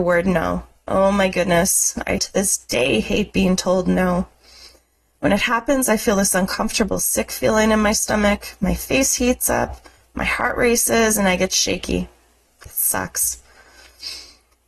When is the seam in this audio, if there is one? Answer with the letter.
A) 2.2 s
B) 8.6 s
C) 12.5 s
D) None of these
A